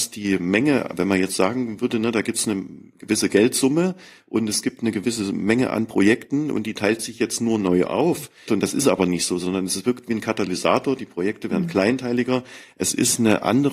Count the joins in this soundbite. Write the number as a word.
one